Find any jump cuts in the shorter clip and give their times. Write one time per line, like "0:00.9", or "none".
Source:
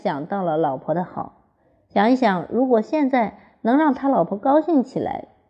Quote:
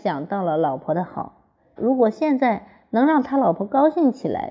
0:01.8